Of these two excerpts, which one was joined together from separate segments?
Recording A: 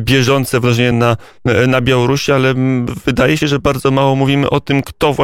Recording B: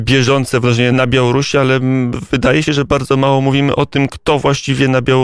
B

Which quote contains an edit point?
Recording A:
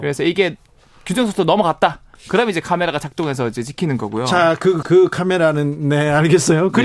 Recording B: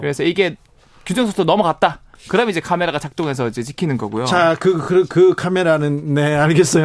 A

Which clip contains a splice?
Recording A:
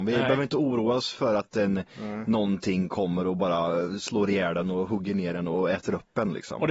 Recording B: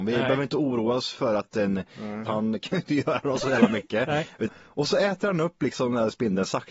B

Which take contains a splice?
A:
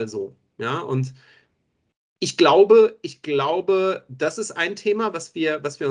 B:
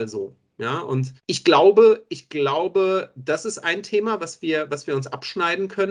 B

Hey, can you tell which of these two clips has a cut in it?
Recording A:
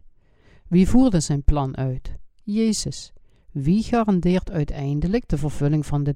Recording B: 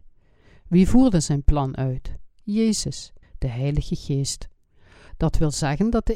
B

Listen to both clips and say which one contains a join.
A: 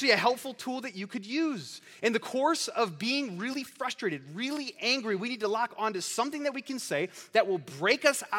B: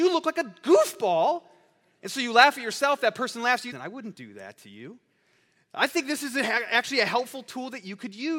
B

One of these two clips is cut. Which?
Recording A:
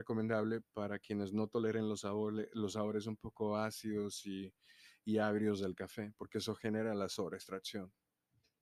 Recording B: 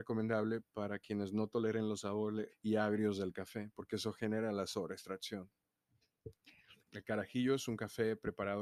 B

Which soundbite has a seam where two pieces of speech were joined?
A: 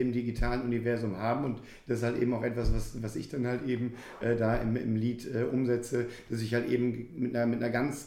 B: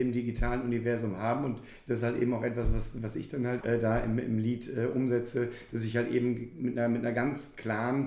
B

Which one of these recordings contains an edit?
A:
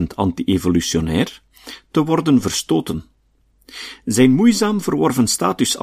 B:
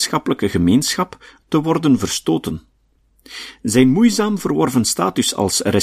B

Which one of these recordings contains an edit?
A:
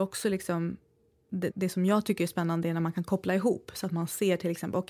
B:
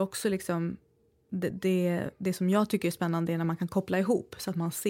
A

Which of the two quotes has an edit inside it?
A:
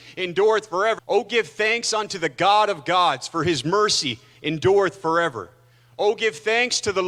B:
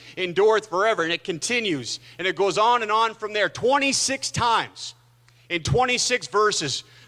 A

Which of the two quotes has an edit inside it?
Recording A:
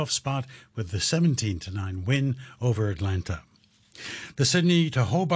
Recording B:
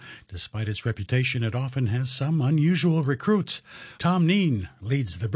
B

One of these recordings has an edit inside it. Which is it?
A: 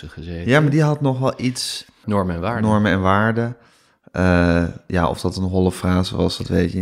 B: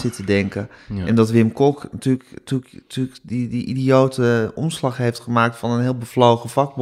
A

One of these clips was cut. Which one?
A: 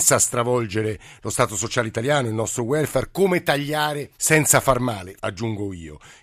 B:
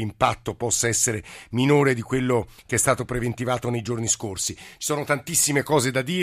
A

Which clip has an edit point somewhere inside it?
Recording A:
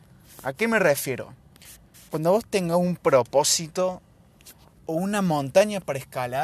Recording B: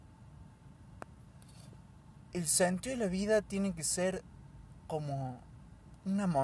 B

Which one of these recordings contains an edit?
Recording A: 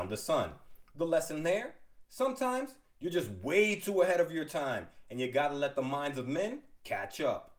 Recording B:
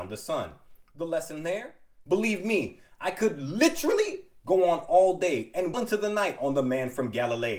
B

